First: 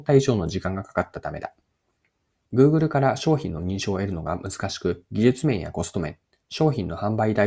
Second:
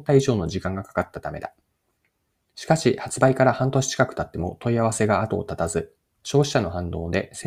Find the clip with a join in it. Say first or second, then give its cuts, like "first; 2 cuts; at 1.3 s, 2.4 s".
first; 1 cut; at 2.5 s